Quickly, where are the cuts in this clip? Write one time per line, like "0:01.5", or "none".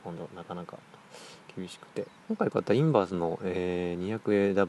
0:02.2